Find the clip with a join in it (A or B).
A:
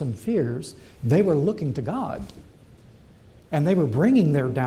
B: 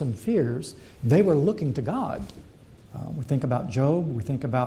B